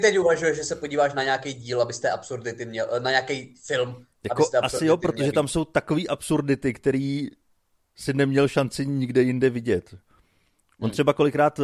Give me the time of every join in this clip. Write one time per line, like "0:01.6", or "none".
none